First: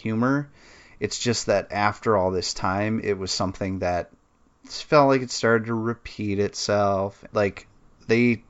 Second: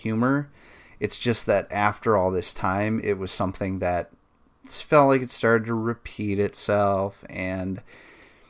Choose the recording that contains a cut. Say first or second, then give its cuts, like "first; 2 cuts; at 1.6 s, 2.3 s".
first; 1 cut; at 7.3 s